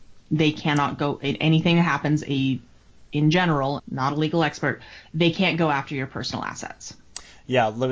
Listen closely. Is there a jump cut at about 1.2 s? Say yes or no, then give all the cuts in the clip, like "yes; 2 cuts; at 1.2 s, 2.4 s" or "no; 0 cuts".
no; 1 cut; at 3.8 s